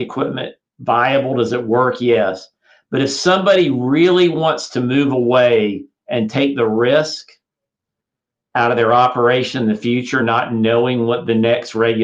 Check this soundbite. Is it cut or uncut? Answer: uncut